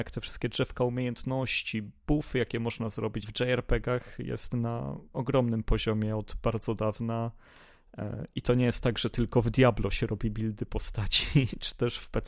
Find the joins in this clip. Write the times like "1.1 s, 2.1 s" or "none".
3.2 s

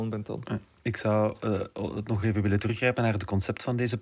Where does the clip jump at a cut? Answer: none

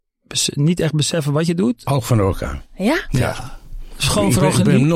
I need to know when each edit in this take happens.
1.8 s

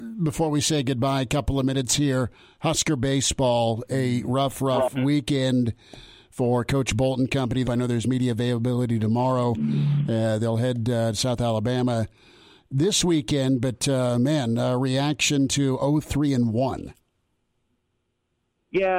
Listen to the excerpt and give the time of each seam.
7.6 s

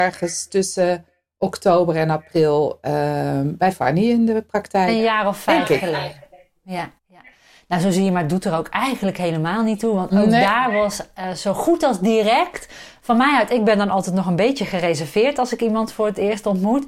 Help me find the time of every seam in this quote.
7.0 s

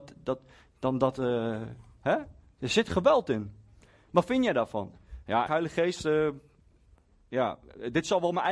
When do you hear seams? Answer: 5.5 s

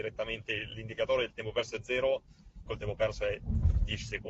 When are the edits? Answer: 2.7 s

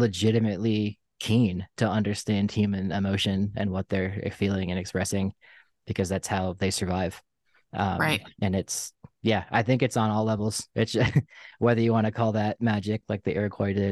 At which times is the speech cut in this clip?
8.3 s

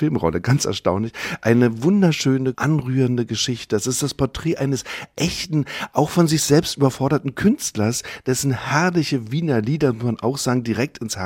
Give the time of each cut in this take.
2.5 s

